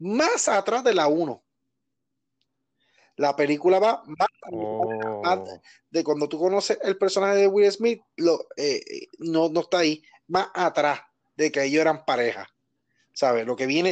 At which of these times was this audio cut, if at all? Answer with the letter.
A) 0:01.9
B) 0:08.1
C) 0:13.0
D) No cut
D